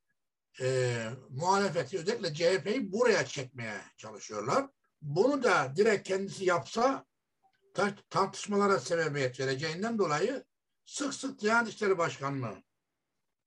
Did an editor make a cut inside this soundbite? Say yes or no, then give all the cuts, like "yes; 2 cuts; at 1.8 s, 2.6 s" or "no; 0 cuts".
yes; 1 cut; at 4.8 s